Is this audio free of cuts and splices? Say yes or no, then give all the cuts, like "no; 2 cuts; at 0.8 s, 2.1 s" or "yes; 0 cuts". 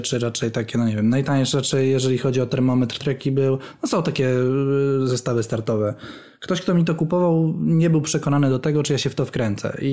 no; 1 cut; at 3.0 s